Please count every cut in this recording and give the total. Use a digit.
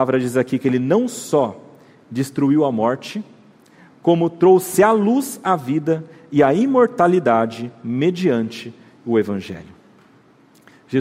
0